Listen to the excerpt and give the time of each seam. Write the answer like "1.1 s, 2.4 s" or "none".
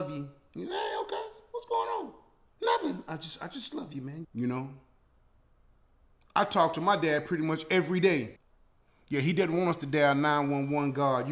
4.2 s, 8.4 s